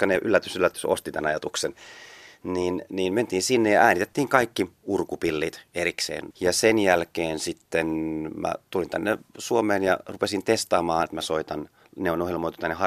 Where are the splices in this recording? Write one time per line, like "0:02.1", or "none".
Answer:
0:06.3
0:08.7
0:11.1

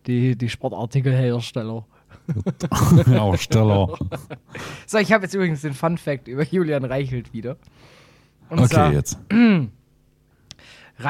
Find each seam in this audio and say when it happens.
none

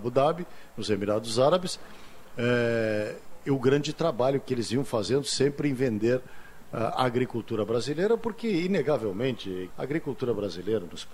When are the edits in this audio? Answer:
0:09.7

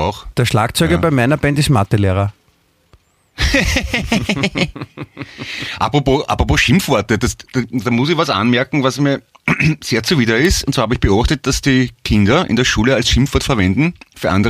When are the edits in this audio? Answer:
none

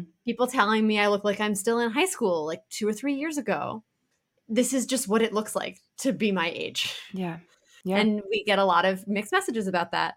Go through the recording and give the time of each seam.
none

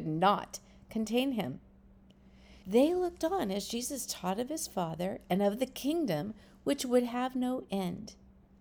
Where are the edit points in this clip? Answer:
0:02.6

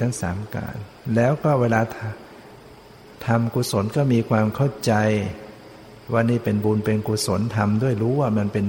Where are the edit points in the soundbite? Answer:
0:06.0

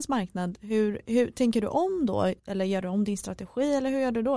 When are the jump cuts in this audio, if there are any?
0:02.4

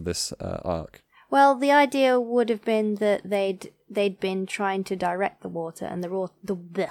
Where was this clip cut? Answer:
none

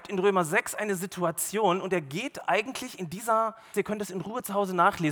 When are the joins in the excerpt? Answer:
0:03.7

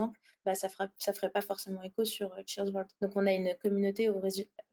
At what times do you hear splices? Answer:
0:03.0

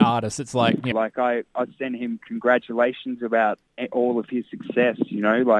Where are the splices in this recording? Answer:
0:00.9

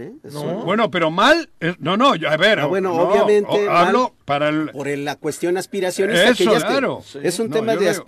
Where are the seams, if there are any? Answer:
0:04.2
0:06.6

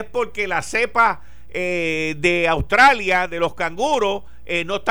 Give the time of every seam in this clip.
none

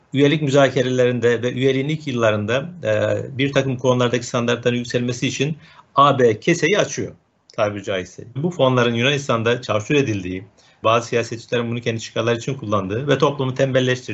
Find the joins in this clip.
0:08.4
0:10.8

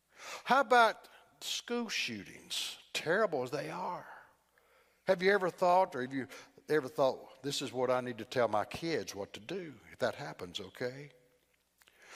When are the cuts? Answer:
none

